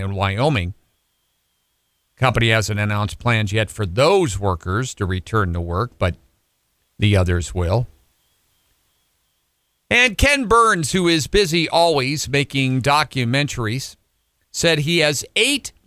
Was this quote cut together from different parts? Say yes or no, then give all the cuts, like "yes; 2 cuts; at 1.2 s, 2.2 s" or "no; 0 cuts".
no; 0 cuts